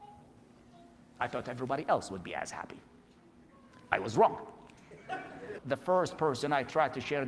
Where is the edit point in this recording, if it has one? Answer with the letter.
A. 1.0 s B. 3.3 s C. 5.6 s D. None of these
C